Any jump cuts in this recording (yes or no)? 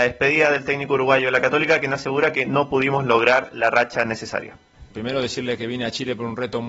yes